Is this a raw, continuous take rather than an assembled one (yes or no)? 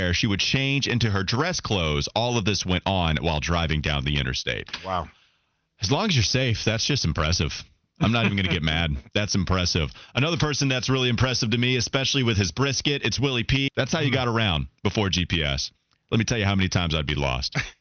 no